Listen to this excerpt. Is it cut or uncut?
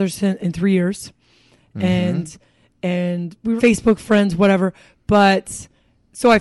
cut